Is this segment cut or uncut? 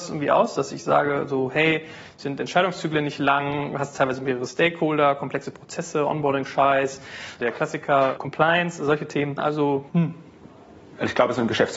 cut